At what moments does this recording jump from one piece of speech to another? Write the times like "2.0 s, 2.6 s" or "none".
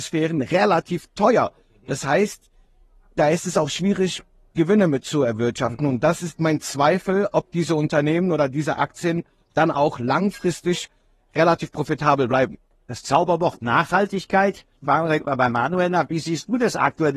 none